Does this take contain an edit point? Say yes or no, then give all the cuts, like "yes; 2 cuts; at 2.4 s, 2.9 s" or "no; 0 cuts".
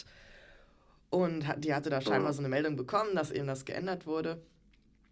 no; 0 cuts